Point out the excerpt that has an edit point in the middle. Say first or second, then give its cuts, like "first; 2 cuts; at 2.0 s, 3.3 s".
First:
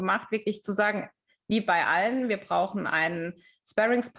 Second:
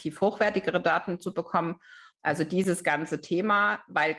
second; 1 cut; at 2.1 s